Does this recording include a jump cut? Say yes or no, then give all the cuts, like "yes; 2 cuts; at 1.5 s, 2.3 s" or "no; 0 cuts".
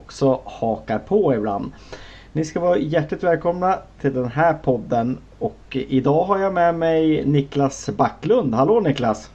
no; 0 cuts